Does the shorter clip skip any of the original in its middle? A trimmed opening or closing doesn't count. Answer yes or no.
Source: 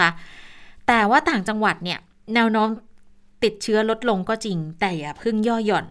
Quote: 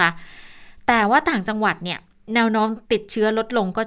yes